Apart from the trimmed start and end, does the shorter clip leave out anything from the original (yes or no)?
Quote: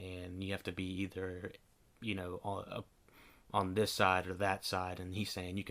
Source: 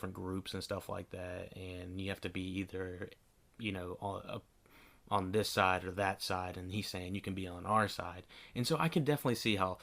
no